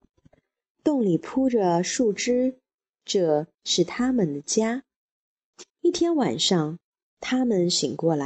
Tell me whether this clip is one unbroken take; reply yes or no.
no